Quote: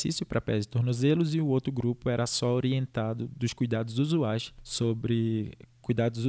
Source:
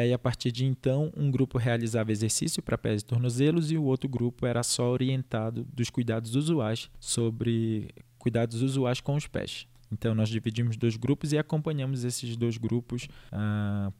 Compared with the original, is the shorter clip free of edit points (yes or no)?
yes